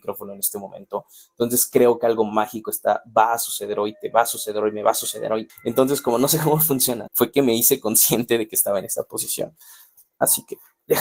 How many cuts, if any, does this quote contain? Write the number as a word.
two